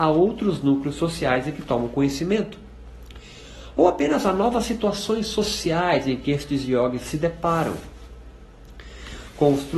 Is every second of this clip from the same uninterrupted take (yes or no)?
yes